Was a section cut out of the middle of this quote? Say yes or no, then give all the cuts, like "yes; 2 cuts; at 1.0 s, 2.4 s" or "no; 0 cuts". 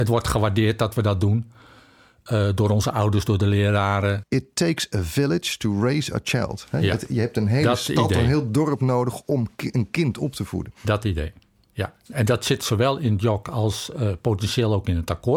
yes; 1 cut; at 4.2 s